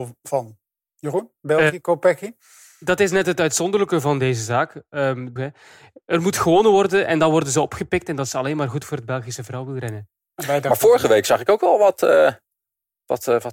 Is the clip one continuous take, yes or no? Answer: no